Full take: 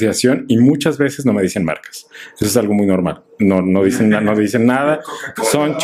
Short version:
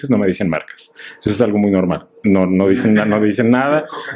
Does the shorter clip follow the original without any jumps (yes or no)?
yes